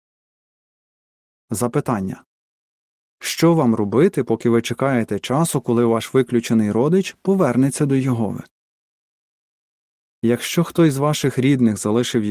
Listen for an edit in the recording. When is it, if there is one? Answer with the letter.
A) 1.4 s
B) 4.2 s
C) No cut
A